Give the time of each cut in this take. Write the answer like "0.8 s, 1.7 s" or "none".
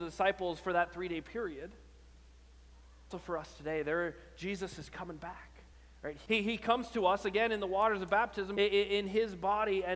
3.1 s, 6.3 s, 8.6 s

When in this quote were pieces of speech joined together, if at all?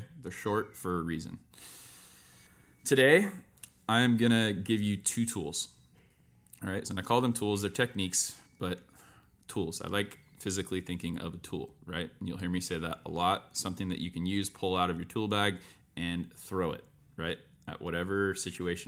6.8 s

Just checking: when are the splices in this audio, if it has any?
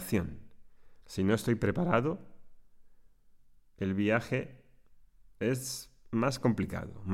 1.0 s

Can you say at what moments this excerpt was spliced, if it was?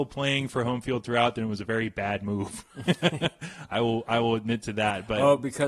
none

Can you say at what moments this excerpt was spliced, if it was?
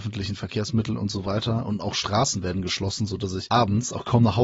none

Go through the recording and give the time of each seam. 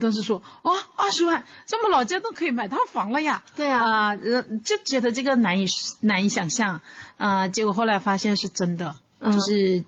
none

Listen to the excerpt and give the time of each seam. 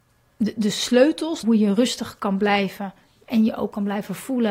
1.4 s

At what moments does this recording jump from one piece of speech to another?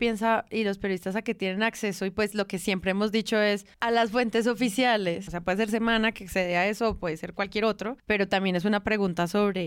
5.3 s

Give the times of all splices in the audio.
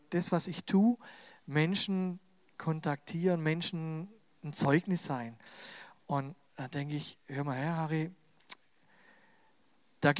none

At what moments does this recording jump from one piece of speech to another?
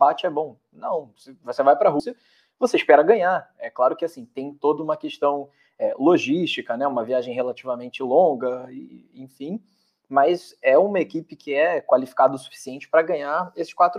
none

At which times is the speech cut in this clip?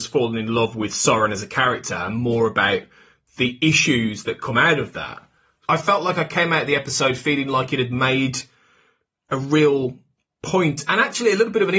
5.6 s

